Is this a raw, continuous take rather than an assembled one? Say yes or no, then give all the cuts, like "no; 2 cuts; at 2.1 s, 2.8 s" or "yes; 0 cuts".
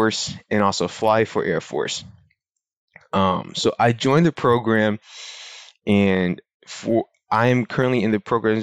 yes; 0 cuts